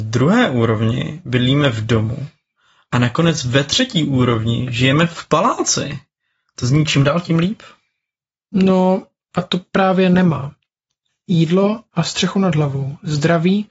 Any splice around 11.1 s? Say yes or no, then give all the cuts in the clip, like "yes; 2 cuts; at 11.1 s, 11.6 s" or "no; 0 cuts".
yes; 1 cut; at 11.1 s